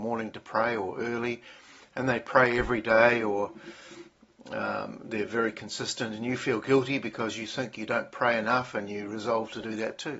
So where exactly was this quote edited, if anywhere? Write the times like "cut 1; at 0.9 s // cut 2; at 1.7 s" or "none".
none